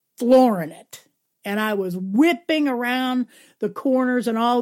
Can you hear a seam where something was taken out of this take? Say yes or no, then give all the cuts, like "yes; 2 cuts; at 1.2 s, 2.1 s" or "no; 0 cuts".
no; 0 cuts